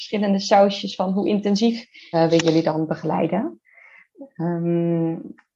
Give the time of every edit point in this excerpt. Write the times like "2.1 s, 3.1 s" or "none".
2.1 s